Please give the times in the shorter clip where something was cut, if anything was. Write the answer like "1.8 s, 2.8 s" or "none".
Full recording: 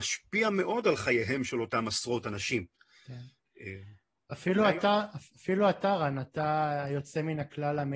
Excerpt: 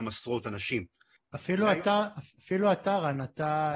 1.2 s